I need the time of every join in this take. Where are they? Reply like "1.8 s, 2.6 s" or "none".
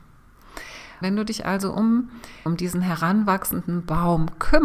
1.0 s, 2.5 s